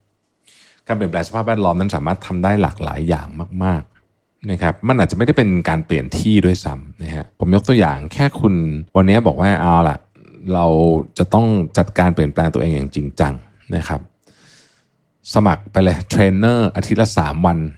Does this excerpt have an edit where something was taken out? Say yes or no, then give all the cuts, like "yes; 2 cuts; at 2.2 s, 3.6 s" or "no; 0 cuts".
yes; 2 cuts; at 7.3 s, 8.9 s